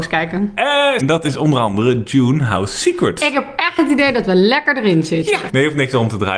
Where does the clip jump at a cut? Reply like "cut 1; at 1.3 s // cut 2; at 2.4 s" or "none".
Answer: cut 1; at 1.0 s // cut 2; at 5.5 s